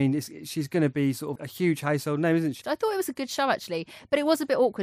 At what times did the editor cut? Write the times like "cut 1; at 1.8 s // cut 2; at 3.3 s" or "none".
cut 1; at 1.4 s // cut 2; at 2.6 s